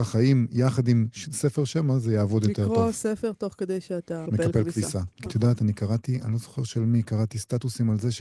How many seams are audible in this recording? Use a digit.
2